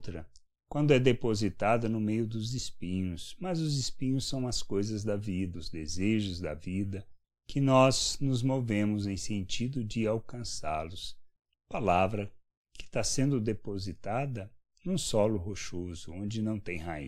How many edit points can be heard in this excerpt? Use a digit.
2